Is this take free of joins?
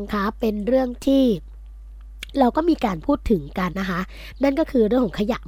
no; 1 cut; at 3.7 s

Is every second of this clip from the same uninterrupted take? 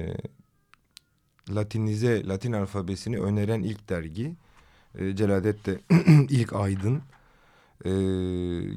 yes; 0 cuts

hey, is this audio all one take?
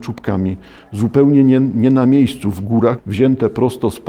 no; 1 cut; at 3.0 s

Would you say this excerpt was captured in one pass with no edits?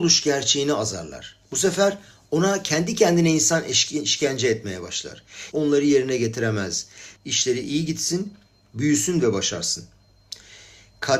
no; 2 cuts; at 5.5 s, 7.2 s

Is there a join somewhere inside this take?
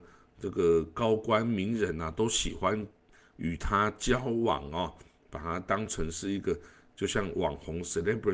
no; 0 cuts

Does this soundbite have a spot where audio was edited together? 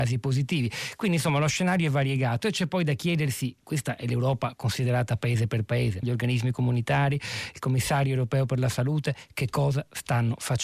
yes; 1 cut; at 6.0 s

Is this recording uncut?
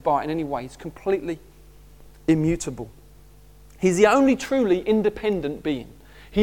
yes; 0 cuts

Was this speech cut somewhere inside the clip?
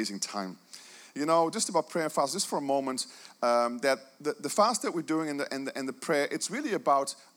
no; 0 cuts

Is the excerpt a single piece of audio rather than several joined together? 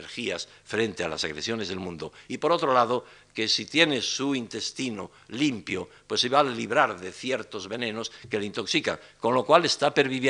yes; 0 cuts

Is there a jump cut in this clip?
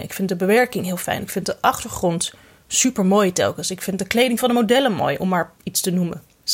no; 0 cuts

